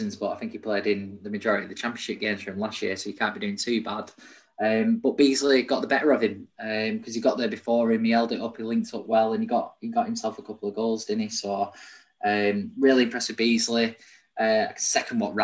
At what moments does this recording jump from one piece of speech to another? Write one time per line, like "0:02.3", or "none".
none